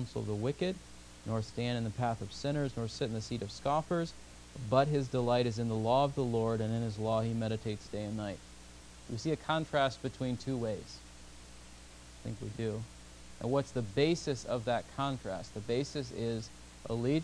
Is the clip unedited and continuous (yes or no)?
yes